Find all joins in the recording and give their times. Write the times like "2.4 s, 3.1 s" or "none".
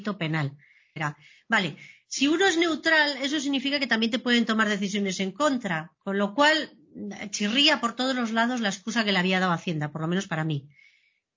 1.0 s